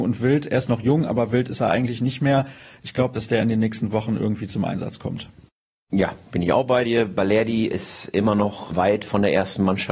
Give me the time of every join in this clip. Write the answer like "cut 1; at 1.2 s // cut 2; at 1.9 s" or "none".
cut 1; at 3.2 s